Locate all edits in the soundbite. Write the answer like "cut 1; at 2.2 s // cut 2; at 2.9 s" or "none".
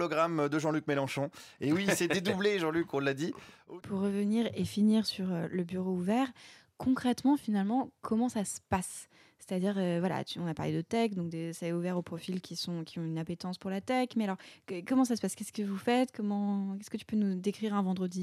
cut 1; at 3.8 s